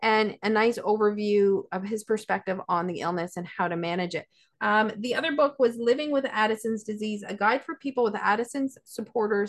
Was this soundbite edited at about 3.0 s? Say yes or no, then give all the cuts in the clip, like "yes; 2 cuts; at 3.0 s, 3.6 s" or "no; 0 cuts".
no; 1 cut; at 4.5 s